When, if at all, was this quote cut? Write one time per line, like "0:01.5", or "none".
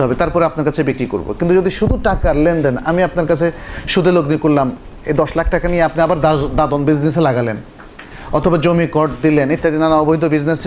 0:09.6